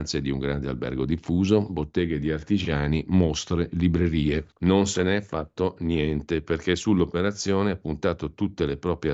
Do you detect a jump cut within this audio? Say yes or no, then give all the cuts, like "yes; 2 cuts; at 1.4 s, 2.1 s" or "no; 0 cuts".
yes; 1 cut; at 4.5 s